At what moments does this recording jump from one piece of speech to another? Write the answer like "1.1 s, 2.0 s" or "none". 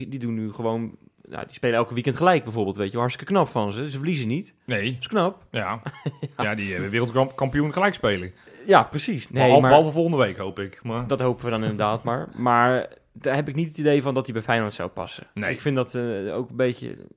none